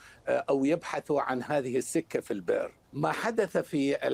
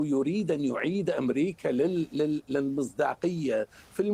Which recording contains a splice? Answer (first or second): first